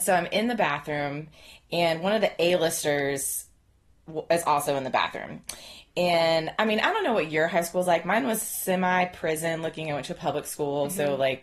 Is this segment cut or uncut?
uncut